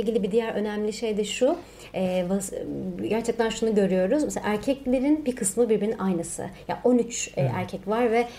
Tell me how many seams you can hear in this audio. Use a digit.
0